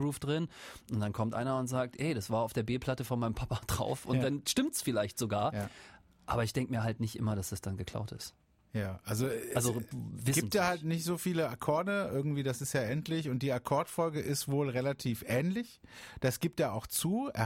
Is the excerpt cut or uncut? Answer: uncut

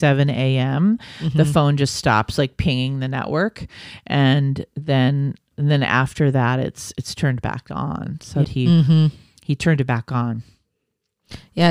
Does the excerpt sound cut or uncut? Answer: cut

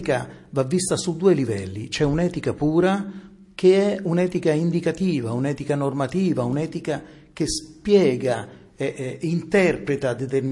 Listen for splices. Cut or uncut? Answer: uncut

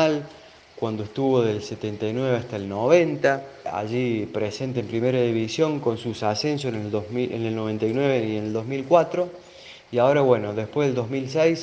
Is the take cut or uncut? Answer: cut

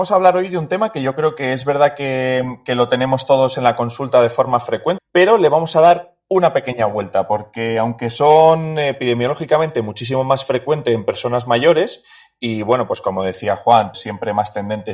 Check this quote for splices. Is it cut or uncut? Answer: cut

